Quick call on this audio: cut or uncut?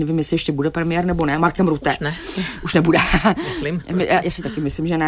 uncut